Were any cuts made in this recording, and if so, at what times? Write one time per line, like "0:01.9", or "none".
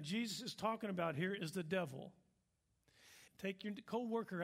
0:03.3